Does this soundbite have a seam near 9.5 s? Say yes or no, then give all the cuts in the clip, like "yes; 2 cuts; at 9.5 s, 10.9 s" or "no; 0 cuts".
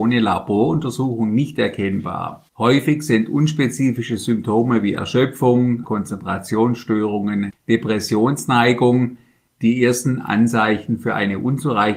no; 3 cuts; at 2.5 s, 5.8 s, 7.5 s